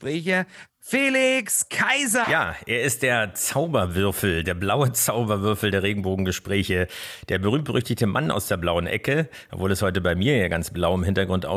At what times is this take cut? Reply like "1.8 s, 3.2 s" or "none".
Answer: 2.2 s

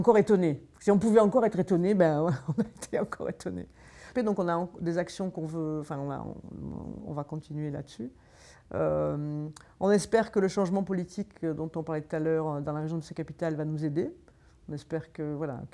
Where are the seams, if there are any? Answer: 4.1 s, 7.0 s

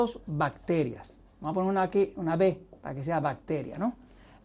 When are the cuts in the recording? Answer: none

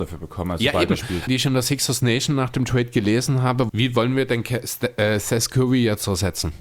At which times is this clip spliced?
1.3 s, 3.7 s

